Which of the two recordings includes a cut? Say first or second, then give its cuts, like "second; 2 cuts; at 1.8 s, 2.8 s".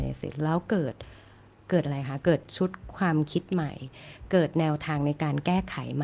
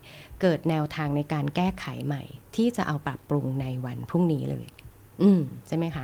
second; 1 cut; at 3.0 s